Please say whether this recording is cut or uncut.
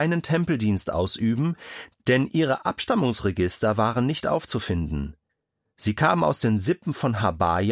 uncut